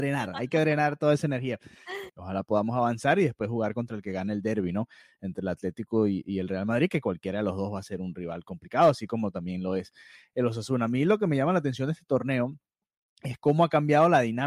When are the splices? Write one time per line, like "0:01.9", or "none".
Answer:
0:02.1